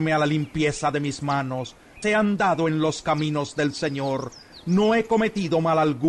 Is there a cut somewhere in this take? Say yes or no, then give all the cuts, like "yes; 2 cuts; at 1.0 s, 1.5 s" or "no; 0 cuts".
yes; 1 cut; at 2.0 s